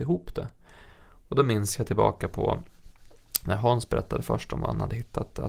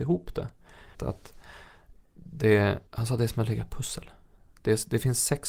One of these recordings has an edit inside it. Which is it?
second; 2 cuts; at 0.9 s, 2.9 s

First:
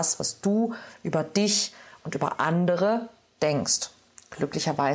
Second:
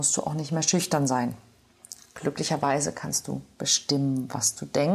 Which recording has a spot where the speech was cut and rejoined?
second; 1 cut; at 2.1 s

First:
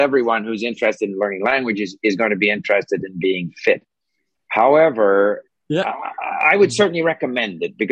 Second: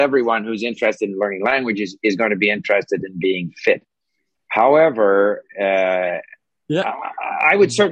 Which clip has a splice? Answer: first; 1 cut; at 5.5 s

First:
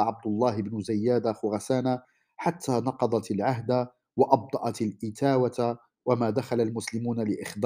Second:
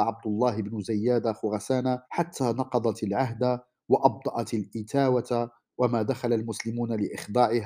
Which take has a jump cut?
second; 1 cut; at 2.0 s

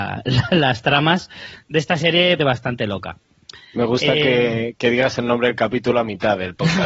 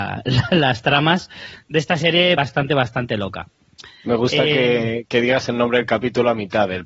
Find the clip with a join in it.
first; 1 cut; at 2.4 s

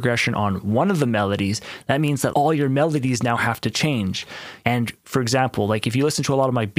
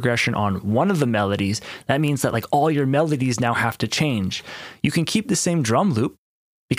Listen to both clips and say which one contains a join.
first; 2 cuts; at 2.3 s, 4.6 s

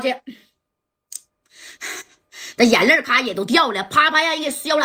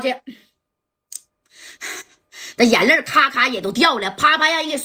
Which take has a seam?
first; 1 cut; at 3.0 s

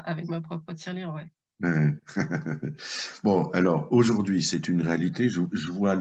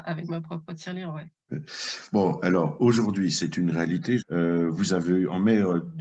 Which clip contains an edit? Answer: second; 2 cuts; at 1.5 s, 4.2 s

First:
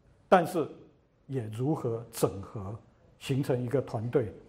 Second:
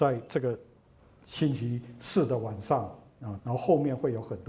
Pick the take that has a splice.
second; 1 cut; at 3.4 s

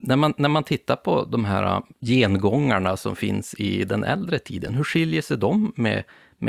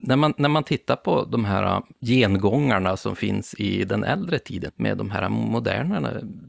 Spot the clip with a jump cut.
second; 1 cut; at 4.7 s

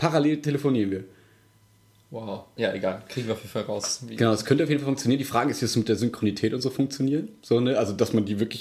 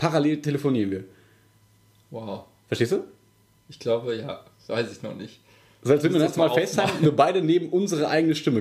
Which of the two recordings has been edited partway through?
first; 1 cut; at 2.6 s

